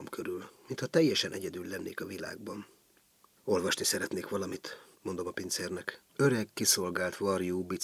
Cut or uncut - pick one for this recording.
cut